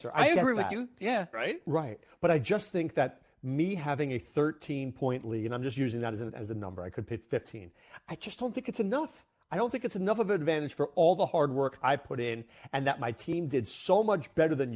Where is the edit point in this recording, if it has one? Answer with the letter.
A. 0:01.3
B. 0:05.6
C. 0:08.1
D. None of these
A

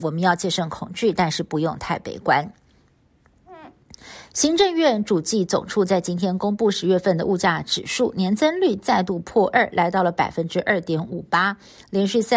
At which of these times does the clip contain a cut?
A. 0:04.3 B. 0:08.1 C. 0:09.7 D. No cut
D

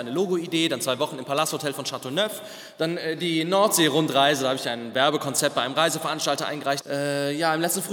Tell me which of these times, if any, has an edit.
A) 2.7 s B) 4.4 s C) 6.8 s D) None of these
C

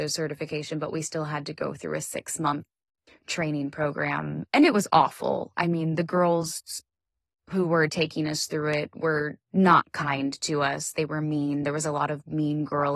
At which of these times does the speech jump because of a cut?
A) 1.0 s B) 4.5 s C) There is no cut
C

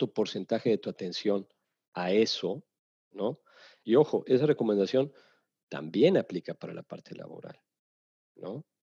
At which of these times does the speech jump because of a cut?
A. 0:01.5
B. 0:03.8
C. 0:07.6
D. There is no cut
B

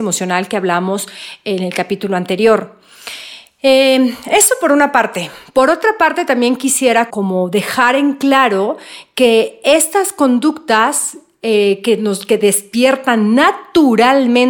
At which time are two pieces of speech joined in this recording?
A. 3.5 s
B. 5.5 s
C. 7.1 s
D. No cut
C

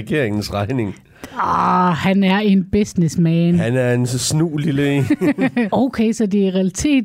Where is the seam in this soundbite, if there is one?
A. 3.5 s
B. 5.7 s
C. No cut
B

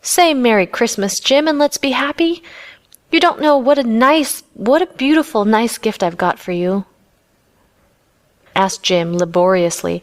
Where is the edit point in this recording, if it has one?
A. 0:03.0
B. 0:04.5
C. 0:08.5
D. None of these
C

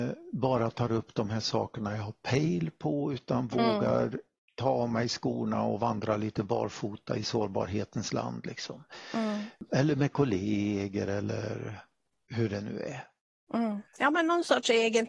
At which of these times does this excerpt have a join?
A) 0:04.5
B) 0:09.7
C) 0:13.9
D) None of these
C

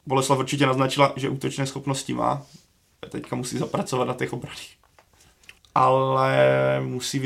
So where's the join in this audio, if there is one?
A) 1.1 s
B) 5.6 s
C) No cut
B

